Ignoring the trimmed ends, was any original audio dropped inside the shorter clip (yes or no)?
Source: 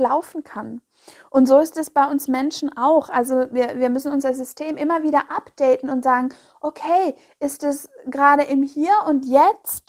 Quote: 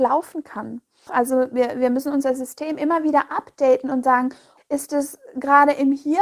yes